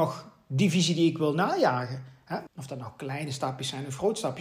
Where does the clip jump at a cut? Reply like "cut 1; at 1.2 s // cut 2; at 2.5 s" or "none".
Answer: cut 1; at 2.5 s